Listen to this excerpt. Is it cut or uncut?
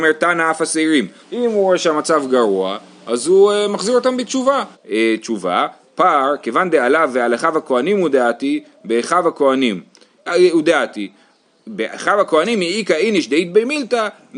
cut